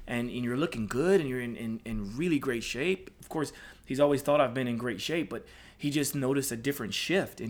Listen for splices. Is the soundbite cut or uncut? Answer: uncut